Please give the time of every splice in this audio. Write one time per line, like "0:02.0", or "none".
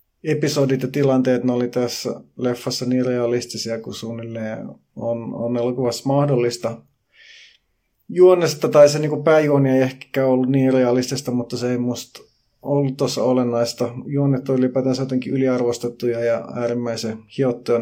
none